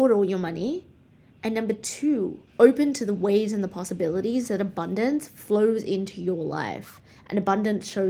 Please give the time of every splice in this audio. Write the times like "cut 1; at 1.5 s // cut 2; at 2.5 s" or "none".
cut 1; at 2.5 s